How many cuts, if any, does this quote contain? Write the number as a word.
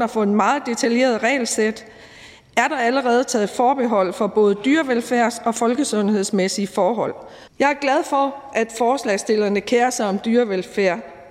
one